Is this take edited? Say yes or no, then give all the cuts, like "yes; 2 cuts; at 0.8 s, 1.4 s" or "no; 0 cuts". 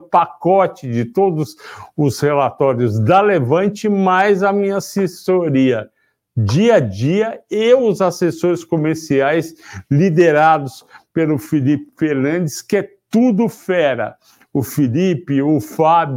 no; 0 cuts